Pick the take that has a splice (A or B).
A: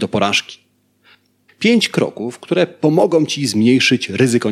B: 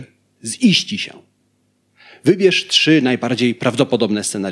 A